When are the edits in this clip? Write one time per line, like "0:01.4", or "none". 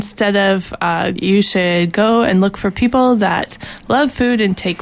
0:01.1